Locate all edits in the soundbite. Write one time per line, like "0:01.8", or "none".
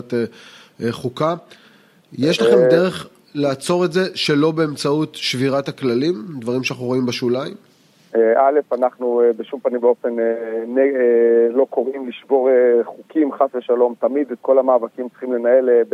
none